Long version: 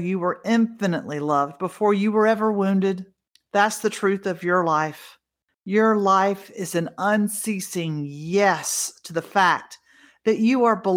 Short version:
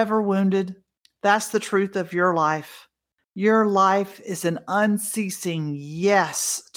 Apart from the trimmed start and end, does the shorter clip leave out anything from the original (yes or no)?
no